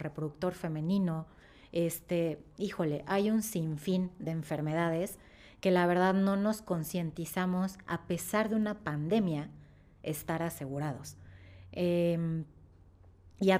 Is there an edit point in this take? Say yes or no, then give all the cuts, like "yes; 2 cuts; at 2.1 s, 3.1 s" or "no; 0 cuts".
no; 0 cuts